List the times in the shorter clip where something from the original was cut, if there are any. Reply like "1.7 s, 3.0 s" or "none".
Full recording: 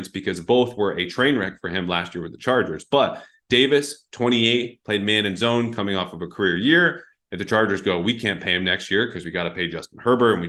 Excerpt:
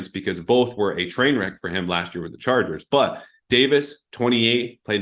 none